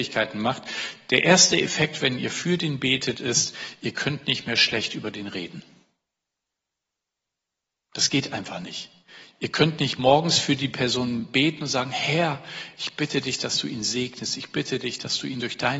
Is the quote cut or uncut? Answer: uncut